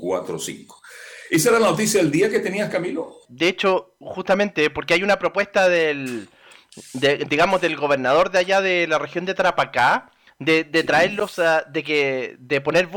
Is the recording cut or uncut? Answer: cut